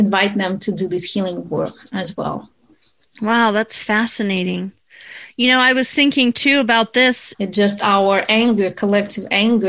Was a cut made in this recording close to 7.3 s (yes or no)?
yes